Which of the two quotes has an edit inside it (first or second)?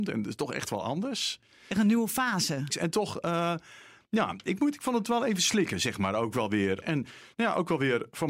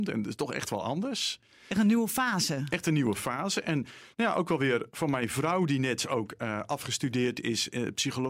first